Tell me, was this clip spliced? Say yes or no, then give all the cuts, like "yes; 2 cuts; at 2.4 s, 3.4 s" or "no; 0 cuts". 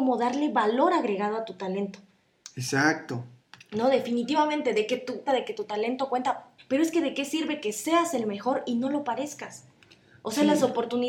yes; 2 cuts; at 5.3 s, 6.6 s